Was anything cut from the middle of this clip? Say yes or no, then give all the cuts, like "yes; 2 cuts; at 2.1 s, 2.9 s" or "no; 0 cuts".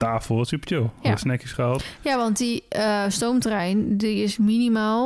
no; 0 cuts